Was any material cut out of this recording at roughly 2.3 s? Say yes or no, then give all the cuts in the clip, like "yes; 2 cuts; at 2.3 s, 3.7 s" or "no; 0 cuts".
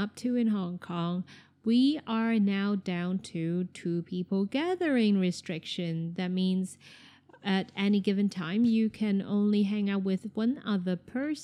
no; 0 cuts